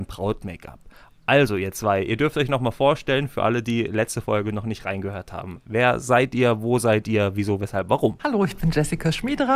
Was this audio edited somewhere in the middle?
no; 0 cuts

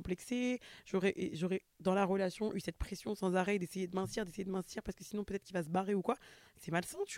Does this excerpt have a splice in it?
no; 0 cuts

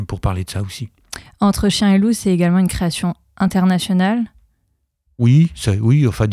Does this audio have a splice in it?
no; 0 cuts

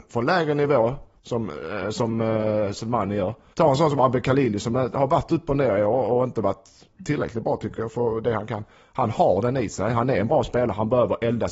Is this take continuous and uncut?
no; 1 cut; at 3.5 s

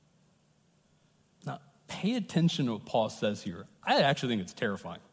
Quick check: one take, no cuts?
yes; 0 cuts

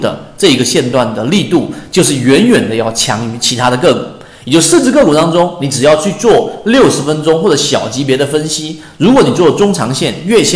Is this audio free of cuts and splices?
yes; 0 cuts

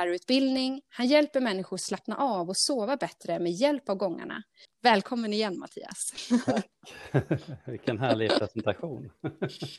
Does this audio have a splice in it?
yes; 1 cut; at 4.7 s

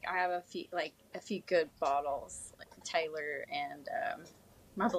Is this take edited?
no; 0 cuts

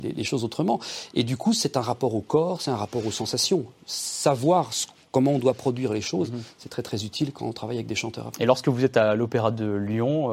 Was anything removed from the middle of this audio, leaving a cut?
no; 0 cuts

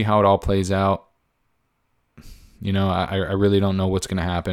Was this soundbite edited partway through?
no; 0 cuts

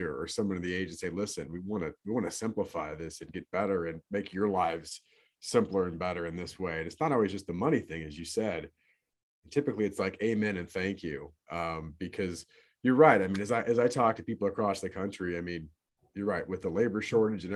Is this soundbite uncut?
yes; 0 cuts

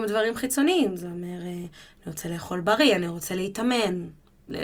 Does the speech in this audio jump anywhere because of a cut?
no; 0 cuts

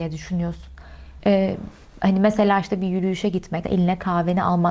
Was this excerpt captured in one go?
no; 2 cuts; at 1.2 s, 3.6 s

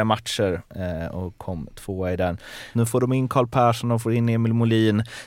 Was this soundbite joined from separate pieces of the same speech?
yes; 1 cut; at 2.7 s

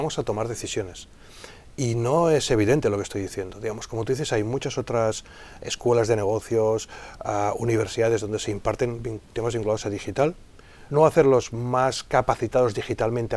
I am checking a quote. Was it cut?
yes; 1 cut; at 10.9 s

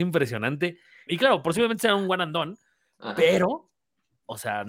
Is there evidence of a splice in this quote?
yes; 1 cut; at 1.1 s

